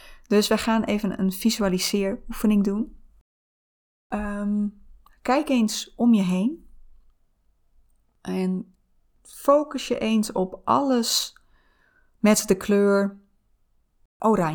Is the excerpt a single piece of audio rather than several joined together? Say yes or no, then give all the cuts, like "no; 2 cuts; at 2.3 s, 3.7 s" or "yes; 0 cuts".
yes; 0 cuts